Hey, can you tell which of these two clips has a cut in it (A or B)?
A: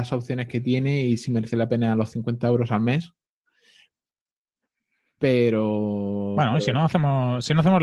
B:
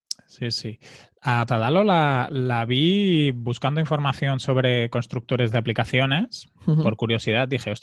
B